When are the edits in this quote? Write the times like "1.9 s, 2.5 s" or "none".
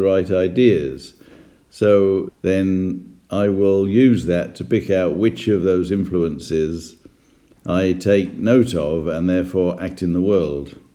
2.3 s